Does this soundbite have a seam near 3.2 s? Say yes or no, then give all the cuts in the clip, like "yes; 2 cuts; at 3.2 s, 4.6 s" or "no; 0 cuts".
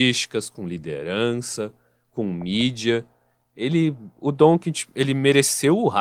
no; 0 cuts